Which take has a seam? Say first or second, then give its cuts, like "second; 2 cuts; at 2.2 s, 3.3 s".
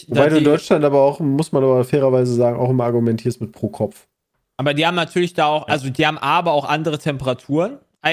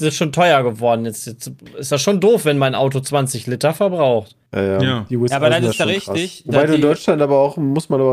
second; 1 cut; at 4.5 s